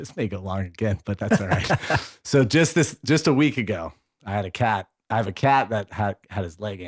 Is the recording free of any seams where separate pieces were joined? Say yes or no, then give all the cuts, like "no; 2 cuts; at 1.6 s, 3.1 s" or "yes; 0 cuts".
yes; 0 cuts